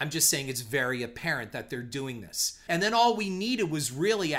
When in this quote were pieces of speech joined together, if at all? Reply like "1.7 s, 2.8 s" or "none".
2.7 s